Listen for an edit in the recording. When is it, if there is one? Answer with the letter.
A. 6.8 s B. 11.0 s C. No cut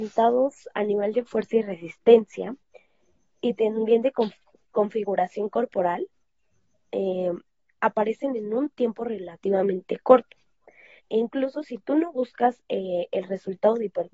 B